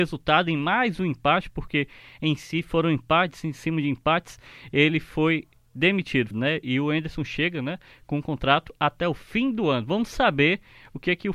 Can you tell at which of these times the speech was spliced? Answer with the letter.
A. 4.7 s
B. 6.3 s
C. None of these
B